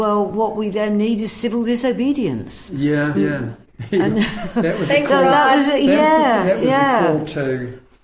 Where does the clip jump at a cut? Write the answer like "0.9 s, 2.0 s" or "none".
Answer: 3.1 s